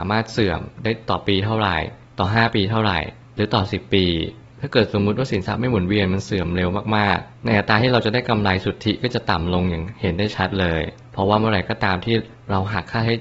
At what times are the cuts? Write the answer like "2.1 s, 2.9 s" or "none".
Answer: none